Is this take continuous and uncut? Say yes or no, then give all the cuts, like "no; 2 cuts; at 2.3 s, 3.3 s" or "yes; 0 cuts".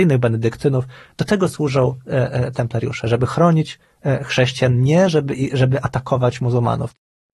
yes; 0 cuts